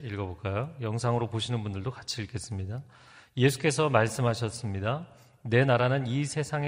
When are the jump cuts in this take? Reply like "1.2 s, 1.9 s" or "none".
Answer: none